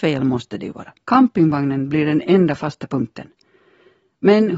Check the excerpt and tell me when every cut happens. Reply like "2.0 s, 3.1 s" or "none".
1.0 s